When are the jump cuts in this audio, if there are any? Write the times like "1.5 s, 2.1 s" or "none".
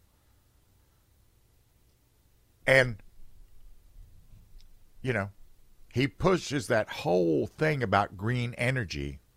2.6 s